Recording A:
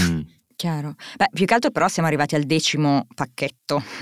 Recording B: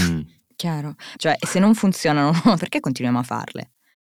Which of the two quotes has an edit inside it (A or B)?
B